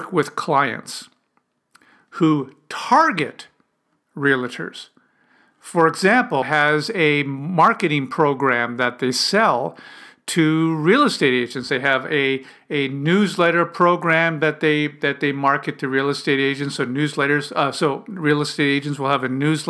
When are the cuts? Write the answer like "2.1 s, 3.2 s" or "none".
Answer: 6.4 s